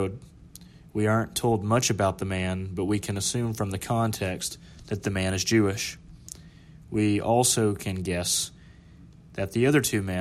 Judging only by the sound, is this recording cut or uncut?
uncut